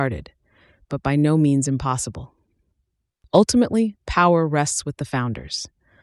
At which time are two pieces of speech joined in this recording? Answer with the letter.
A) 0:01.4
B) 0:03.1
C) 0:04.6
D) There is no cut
D